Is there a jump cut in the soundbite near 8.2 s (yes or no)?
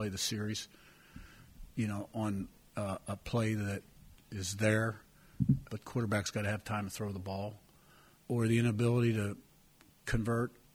yes